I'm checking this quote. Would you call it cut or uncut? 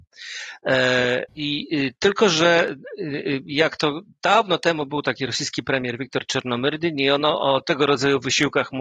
cut